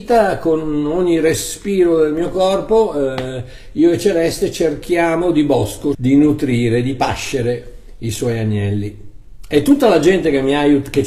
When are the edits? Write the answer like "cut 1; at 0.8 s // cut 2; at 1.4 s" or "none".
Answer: cut 1; at 5.9 s